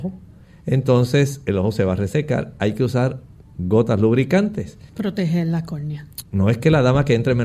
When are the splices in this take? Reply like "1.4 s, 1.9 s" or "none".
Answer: 4.9 s, 6.2 s